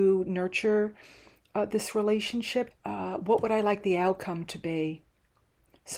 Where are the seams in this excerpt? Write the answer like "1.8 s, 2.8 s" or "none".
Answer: 2.7 s

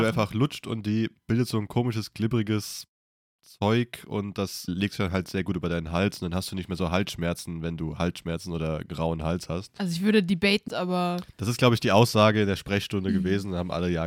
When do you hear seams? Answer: 4.7 s, 10.7 s

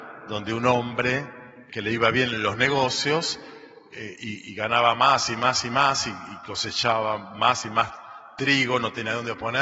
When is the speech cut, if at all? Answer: 1.7 s

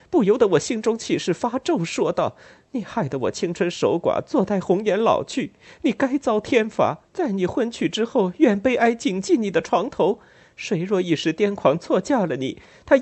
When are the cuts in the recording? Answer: 7.1 s

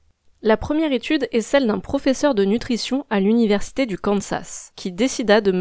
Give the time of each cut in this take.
4.7 s

